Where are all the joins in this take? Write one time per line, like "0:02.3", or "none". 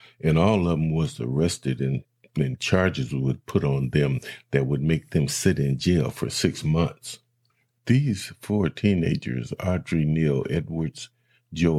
0:07.8